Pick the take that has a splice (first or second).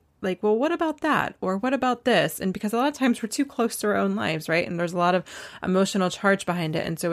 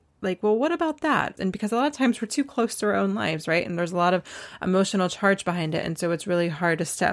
second